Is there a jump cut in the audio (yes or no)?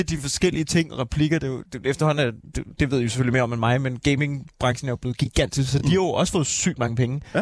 no